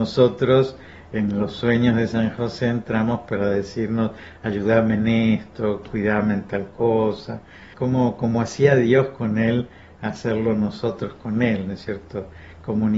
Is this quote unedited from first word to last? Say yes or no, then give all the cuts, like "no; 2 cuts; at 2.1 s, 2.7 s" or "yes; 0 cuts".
no; 1 cut; at 7.7 s